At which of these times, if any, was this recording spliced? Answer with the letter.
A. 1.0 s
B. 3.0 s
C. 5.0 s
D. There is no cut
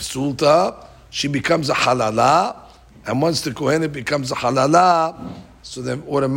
D